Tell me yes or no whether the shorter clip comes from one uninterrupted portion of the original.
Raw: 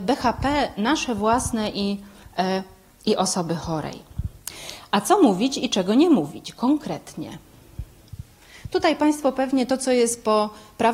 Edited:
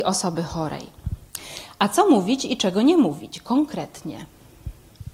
yes